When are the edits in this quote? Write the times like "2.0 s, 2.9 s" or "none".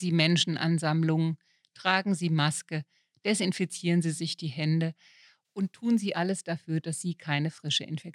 none